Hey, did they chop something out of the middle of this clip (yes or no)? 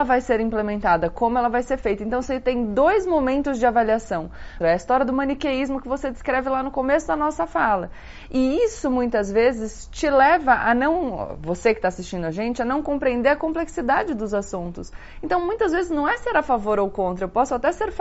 yes